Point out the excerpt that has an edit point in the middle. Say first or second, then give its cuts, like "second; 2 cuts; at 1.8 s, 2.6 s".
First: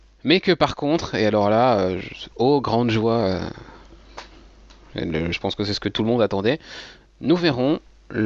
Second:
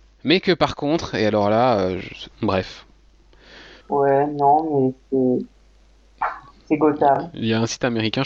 second; 2 cuts; at 2.3 s, 3.8 s